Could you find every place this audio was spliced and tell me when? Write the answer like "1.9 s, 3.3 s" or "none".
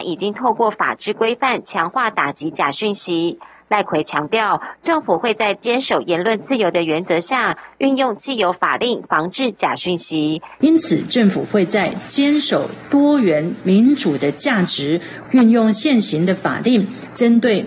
10.6 s, 15.2 s